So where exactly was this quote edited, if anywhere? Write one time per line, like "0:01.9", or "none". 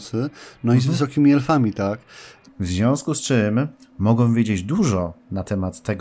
0:02.5